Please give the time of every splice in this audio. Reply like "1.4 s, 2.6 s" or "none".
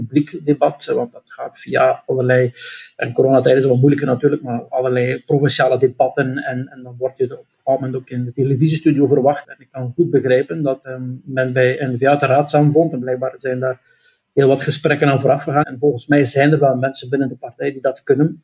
9.4 s, 10.8 s, 15.6 s